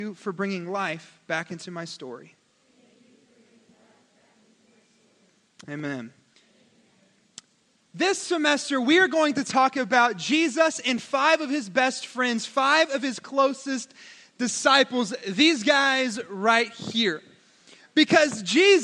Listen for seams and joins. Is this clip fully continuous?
yes; 0 cuts

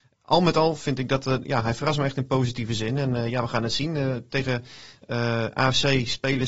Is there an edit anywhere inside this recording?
no; 0 cuts

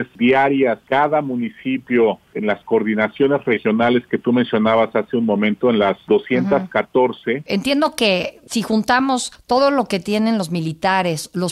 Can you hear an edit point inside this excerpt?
yes; 1 cut; at 7.5 s

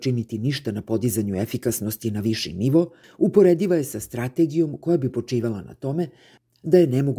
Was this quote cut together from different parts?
yes; 1 cut; at 3.0 s

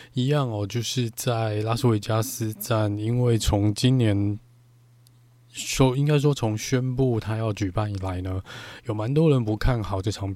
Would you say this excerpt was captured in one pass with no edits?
yes; 0 cuts

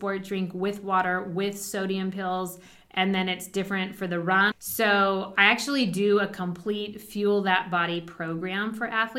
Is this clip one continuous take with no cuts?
no; 1 cut; at 4.5 s

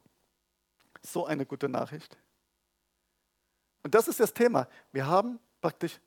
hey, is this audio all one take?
no; 1 cut; at 3.8 s

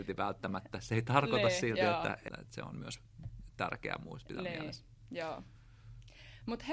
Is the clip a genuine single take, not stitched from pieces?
no; 1 cut; at 2.3 s

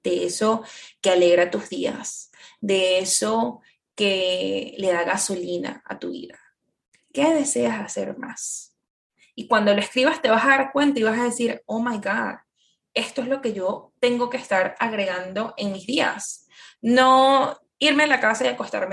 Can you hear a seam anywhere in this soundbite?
no; 0 cuts

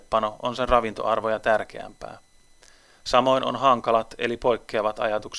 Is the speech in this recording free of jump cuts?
yes; 0 cuts

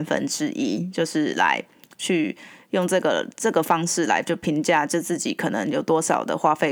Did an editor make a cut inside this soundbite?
no; 0 cuts

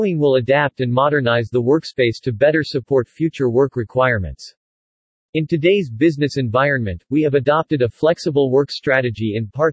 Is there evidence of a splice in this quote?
no; 0 cuts

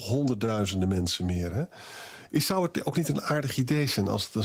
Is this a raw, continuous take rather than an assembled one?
yes; 0 cuts

